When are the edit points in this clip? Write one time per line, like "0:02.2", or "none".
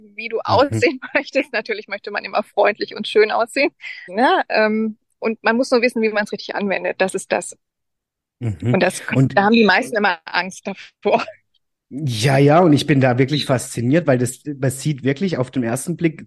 0:04.1